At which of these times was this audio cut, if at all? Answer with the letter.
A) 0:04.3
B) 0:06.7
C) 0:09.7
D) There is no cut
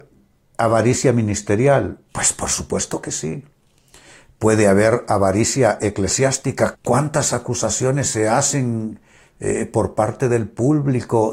B